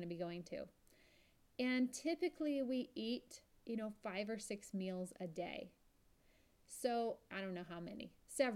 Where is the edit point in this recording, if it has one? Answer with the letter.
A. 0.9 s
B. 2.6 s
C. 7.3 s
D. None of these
C